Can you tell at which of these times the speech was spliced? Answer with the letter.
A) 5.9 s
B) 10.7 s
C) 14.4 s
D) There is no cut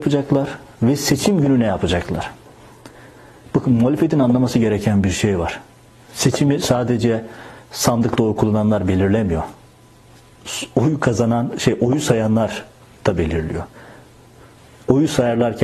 D